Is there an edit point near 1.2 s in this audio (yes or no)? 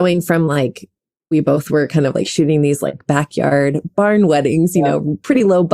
no